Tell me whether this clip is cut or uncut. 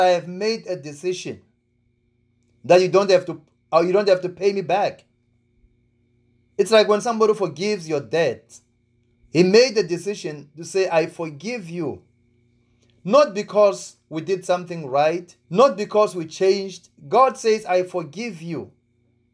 cut